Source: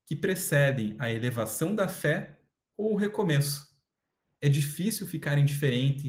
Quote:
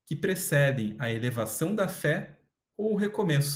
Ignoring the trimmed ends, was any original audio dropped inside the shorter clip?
no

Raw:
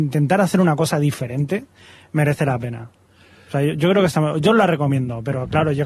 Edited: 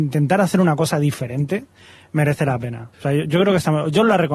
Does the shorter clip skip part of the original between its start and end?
yes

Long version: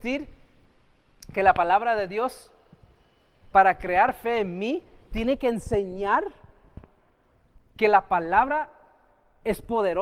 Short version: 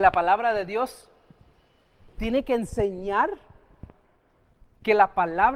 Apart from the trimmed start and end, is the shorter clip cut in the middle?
yes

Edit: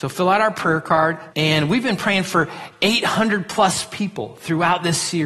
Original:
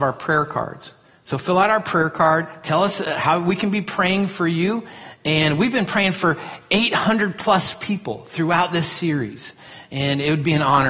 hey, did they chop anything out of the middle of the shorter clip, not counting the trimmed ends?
yes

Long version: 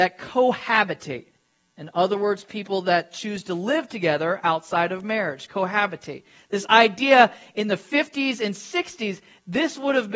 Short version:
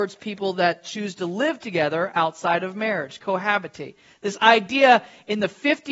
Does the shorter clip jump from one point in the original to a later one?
no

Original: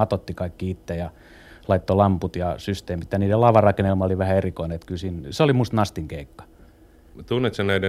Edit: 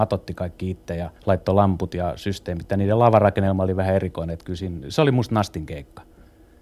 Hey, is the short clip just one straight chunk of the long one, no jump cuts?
no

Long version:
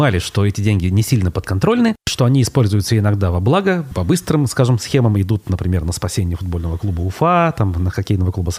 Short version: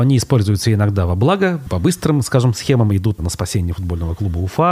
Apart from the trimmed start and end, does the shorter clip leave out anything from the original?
yes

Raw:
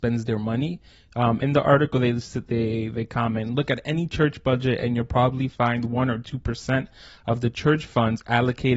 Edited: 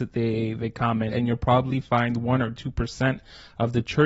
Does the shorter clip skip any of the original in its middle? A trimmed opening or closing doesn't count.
yes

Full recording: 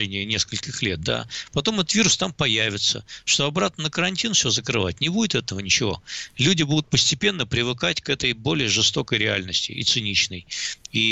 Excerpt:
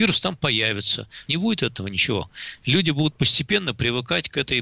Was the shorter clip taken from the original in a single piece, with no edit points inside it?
no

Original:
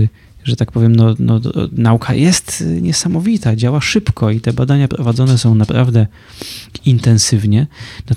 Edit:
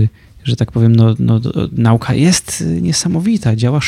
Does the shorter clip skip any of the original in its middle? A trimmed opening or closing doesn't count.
no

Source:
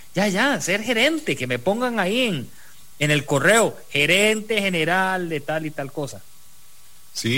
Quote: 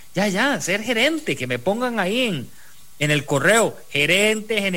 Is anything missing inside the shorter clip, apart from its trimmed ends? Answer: no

